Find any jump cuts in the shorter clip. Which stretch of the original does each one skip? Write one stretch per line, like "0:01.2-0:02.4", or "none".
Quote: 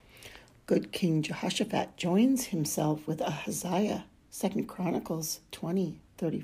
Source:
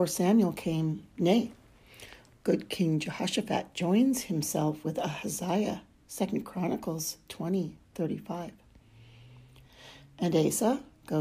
none